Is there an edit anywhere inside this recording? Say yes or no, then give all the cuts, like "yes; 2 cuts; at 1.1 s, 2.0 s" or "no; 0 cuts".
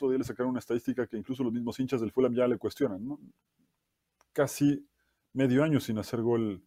no; 0 cuts